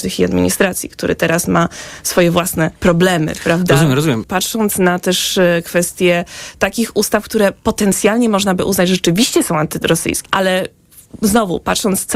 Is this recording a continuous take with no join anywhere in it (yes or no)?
no